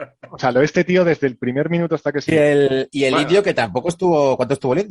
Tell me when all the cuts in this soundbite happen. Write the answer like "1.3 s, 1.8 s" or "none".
2.3 s